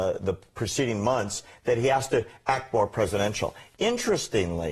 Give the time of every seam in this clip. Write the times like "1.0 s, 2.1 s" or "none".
none